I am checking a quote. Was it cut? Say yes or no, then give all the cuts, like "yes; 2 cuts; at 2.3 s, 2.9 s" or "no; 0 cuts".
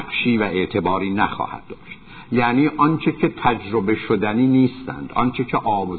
no; 0 cuts